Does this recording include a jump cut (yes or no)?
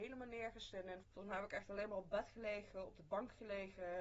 yes